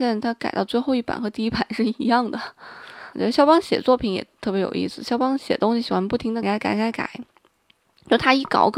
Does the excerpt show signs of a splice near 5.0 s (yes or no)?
no